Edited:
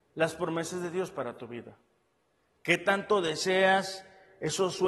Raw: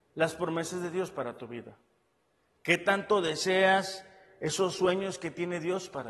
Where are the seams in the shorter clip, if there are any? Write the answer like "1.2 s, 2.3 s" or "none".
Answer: none